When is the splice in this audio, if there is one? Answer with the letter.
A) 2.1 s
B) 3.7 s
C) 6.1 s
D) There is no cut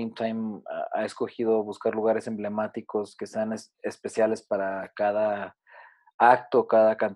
B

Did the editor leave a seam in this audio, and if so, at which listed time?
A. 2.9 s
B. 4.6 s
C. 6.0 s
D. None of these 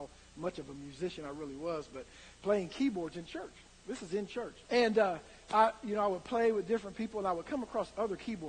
B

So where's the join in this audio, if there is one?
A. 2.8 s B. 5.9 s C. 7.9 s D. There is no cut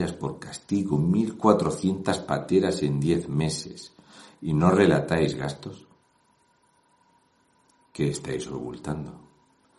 D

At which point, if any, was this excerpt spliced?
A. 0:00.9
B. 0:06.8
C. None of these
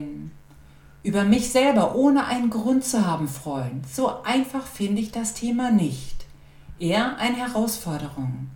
C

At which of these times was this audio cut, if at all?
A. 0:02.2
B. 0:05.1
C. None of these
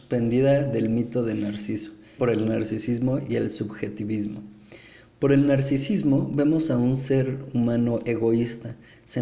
A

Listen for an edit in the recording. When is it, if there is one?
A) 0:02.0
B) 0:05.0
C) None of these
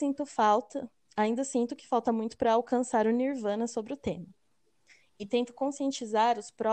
B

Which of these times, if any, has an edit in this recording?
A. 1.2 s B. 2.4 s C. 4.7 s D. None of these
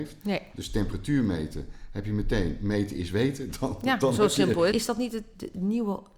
C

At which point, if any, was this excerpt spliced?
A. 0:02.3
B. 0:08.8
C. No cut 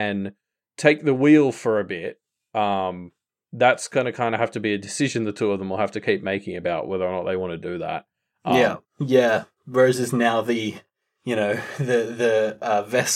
B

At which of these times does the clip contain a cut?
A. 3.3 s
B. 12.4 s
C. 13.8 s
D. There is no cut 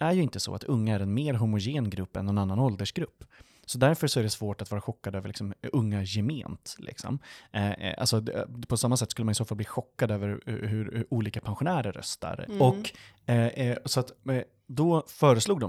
B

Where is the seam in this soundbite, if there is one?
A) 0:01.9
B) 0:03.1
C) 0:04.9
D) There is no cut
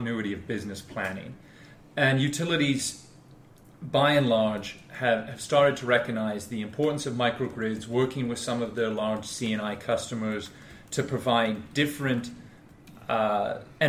D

